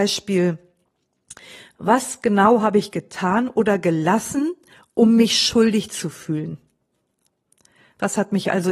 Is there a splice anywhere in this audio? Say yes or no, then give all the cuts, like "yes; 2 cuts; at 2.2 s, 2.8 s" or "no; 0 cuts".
no; 0 cuts